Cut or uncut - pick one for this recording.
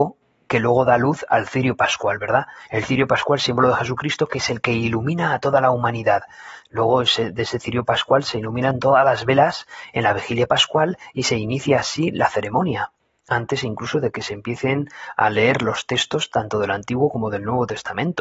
uncut